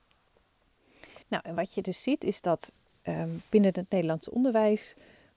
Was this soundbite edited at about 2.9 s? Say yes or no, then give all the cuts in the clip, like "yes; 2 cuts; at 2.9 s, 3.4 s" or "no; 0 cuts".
no; 1 cut; at 1.2 s